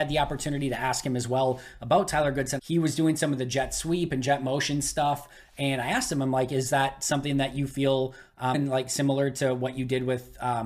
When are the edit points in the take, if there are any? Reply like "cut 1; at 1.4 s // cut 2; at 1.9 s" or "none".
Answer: cut 1; at 2.6 s // cut 2; at 8.5 s